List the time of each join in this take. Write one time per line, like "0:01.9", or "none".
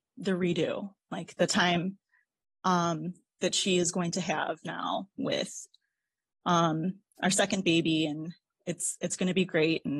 none